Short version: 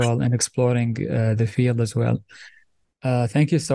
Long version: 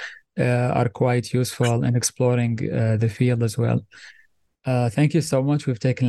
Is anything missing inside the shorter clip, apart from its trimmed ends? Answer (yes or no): no